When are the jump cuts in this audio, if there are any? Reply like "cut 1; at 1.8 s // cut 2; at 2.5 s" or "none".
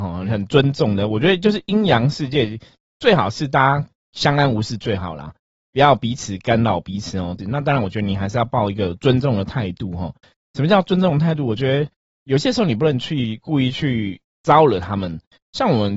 cut 1; at 7.4 s